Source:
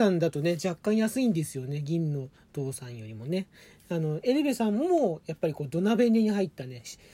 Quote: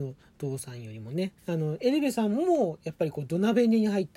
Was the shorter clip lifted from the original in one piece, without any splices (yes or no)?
no